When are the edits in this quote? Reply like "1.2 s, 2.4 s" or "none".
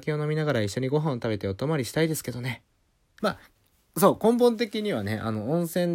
3.2 s